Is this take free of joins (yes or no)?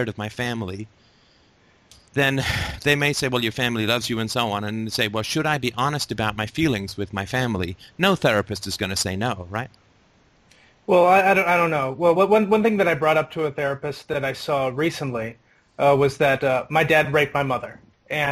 yes